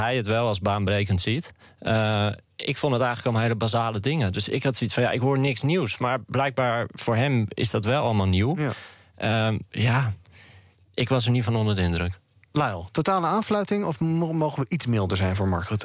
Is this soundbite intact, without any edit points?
yes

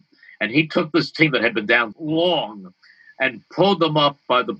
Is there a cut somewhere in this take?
yes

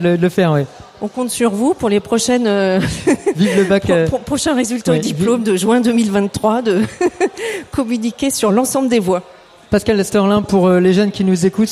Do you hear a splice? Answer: no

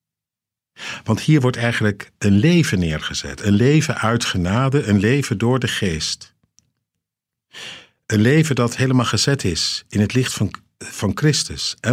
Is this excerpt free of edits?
yes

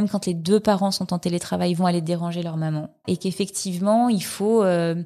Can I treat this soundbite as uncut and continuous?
no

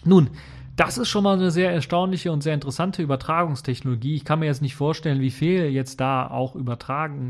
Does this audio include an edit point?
no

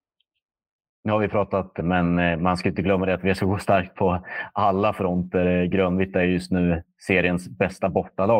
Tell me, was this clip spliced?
yes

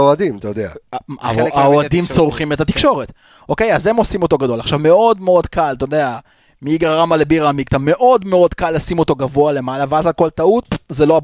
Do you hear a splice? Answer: no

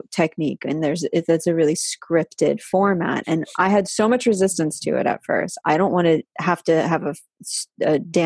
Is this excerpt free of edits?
no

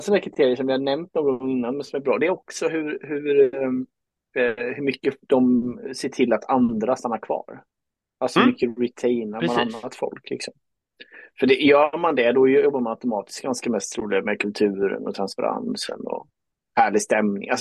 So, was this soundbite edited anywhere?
no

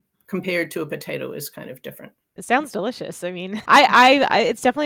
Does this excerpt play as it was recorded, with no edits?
no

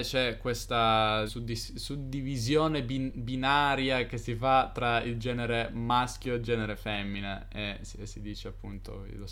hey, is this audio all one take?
no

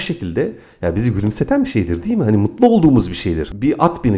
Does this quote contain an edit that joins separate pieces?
no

